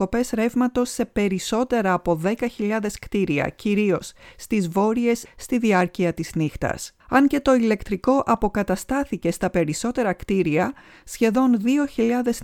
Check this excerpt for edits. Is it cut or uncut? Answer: cut